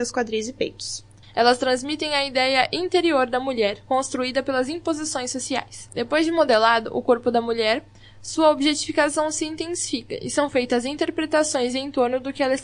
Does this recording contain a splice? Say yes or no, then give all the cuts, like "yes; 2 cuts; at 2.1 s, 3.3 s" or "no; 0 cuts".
yes; 2 cuts; at 1.2 s, 5.9 s